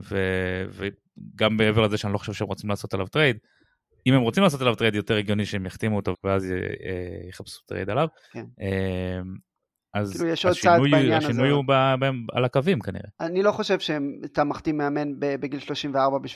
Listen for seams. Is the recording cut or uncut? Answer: cut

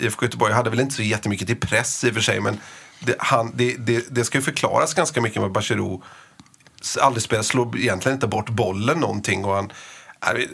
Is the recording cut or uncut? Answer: uncut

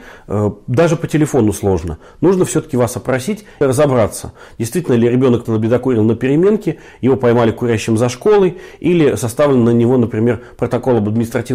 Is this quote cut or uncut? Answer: cut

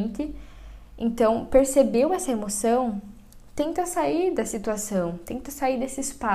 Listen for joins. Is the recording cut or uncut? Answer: uncut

